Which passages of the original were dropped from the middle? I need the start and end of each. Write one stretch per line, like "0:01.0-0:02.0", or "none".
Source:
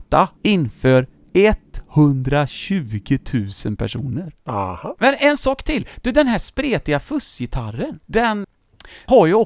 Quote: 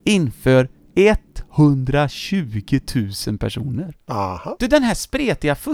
0:05.0-0:06.0